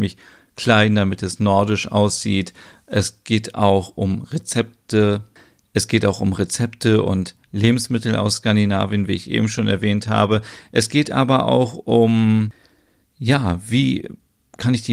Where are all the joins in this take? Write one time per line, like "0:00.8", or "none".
none